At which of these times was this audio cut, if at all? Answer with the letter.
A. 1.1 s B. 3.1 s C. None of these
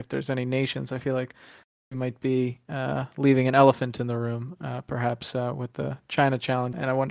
C